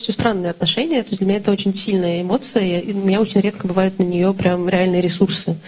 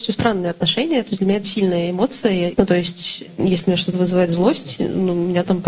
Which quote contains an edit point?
second; 2 cuts; at 1.4 s, 2.5 s

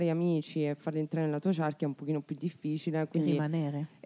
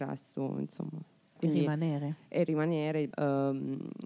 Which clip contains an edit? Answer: second; 2 cuts; at 1.4 s, 3.1 s

